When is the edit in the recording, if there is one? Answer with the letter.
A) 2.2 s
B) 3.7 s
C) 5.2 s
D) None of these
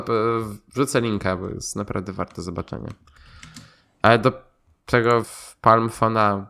C